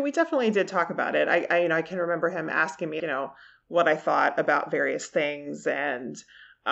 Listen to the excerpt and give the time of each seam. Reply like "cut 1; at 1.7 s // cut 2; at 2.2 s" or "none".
cut 1; at 3.0 s